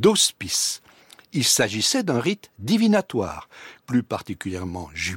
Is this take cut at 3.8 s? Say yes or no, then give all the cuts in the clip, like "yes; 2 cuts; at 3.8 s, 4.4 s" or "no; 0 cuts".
yes; 1 cut; at 3.8 s